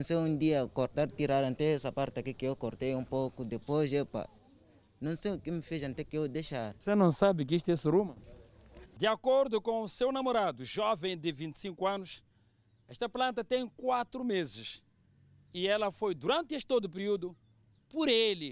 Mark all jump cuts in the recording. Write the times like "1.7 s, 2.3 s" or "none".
8.9 s